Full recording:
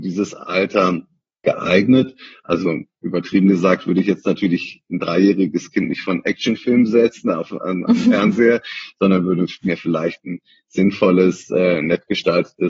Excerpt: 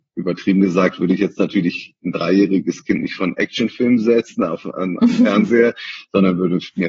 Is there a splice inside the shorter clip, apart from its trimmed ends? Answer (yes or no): no